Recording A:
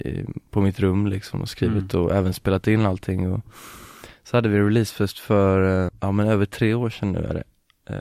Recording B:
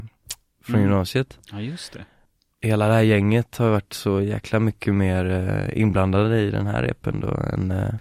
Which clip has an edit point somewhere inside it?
A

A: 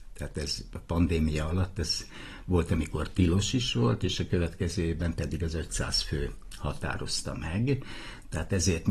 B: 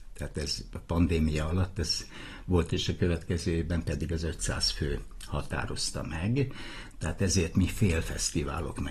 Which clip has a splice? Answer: B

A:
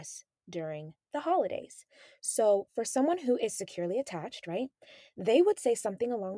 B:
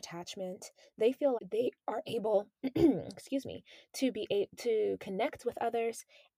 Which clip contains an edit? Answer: B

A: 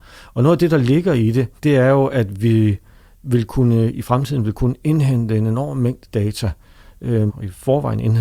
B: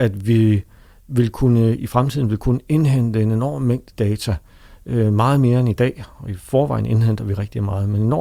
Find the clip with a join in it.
A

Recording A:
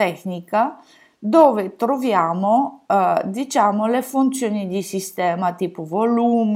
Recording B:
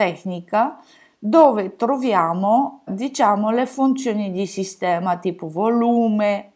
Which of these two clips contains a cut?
B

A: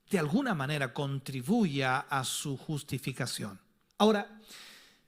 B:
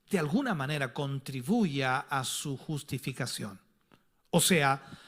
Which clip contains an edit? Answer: A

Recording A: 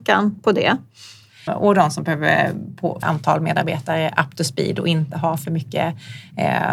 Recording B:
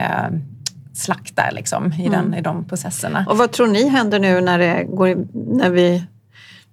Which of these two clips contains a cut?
A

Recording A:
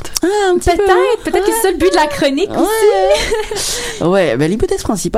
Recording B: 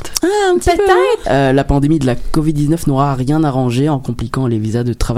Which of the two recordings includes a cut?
B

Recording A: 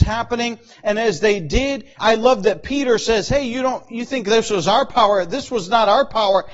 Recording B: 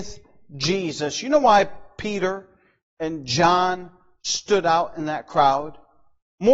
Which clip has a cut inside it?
A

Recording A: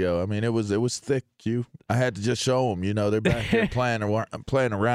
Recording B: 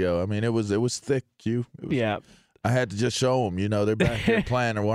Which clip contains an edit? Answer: A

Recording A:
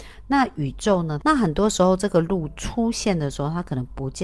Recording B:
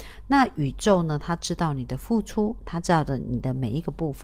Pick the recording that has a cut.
A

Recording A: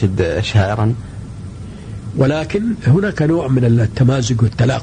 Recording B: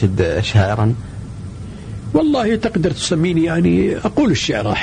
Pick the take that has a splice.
A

